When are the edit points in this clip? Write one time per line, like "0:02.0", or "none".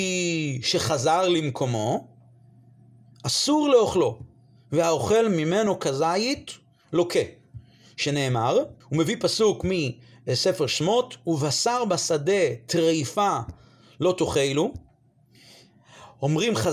0:08.8